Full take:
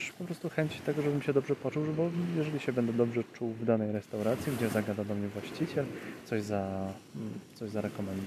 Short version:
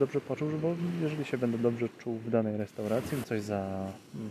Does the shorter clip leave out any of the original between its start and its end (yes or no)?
yes